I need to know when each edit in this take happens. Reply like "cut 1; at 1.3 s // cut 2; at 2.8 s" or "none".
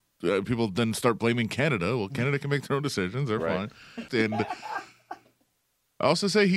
cut 1; at 4.1 s